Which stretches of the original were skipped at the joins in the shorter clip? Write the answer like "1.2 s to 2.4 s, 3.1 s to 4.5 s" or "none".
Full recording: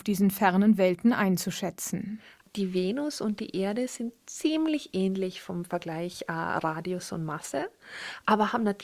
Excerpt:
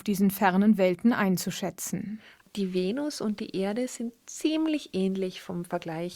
none